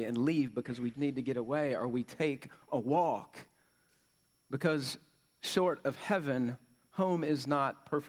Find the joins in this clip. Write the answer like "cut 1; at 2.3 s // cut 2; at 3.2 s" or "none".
cut 1; at 0.9 s